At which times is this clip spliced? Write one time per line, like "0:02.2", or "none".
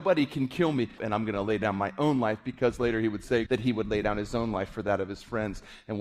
0:01.0
0:03.5